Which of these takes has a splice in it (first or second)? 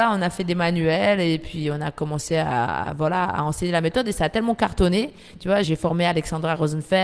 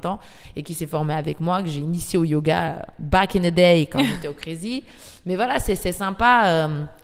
first